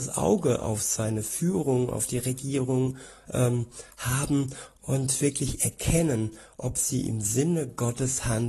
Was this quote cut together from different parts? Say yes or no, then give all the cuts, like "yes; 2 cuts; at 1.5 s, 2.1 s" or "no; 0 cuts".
no; 0 cuts